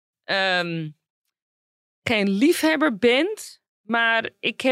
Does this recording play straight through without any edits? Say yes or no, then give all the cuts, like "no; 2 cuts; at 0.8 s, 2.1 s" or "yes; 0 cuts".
yes; 0 cuts